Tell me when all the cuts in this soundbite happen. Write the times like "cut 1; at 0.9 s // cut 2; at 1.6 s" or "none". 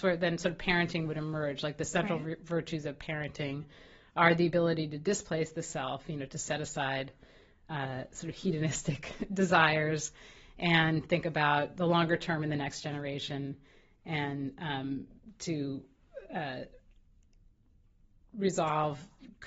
none